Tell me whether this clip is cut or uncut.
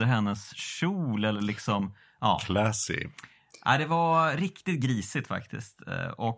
uncut